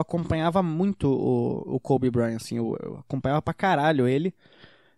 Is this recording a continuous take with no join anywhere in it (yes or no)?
yes